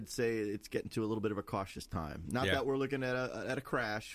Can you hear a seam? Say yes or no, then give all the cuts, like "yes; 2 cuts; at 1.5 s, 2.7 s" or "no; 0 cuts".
no; 0 cuts